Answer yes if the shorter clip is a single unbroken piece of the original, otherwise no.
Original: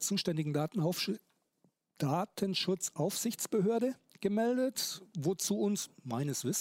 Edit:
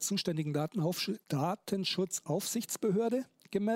no